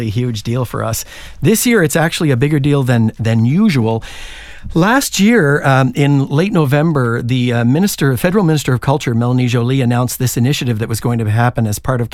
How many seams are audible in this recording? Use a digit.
0